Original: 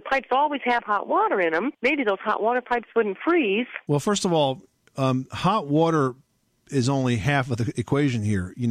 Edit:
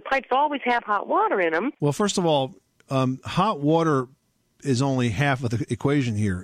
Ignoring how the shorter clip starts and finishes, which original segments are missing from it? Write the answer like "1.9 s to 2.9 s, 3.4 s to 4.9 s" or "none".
1.8 s to 3.8 s